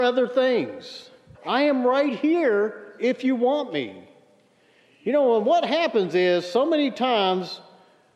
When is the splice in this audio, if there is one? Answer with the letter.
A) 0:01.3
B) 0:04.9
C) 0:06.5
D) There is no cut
A